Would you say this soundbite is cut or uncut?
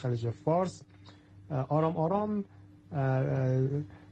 uncut